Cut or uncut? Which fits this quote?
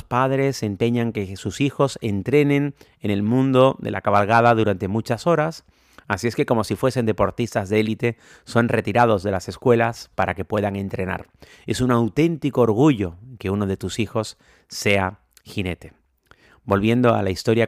cut